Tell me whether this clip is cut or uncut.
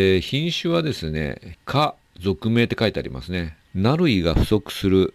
cut